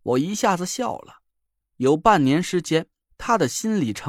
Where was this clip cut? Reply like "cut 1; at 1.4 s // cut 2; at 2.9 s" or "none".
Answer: cut 1; at 1.6 s

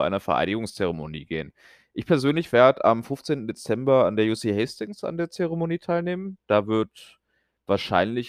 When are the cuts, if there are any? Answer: none

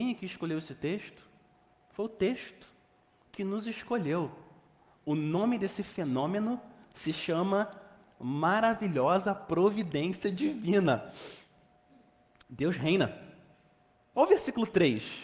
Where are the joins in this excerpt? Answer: cut 1; at 14.1 s

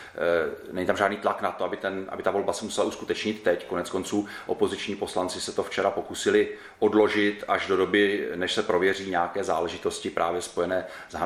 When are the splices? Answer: none

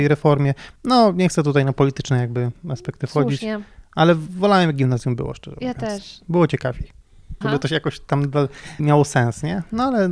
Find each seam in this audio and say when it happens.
cut 1; at 7.4 s // cut 2; at 8.8 s

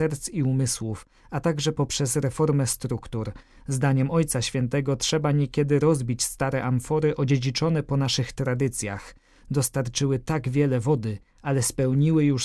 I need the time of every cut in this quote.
none

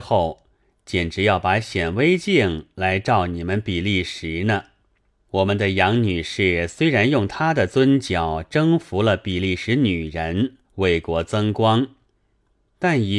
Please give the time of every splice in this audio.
cut 1; at 5.1 s // cut 2; at 10.6 s

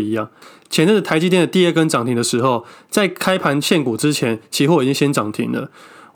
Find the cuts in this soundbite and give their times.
none

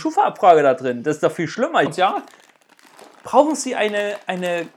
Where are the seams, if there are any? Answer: cut 1; at 1.9 s

